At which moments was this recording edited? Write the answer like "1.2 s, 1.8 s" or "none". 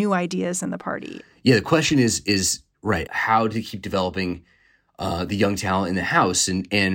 3.1 s